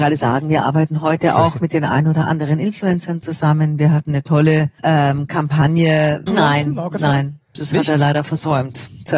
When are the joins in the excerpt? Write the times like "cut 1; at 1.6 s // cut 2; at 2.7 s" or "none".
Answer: cut 1; at 4.8 s // cut 2; at 6.3 s